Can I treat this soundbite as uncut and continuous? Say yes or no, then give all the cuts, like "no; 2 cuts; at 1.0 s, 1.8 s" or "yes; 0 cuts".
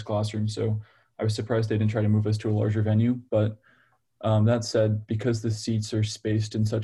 yes; 0 cuts